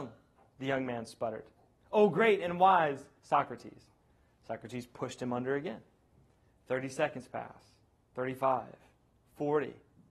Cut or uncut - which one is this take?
uncut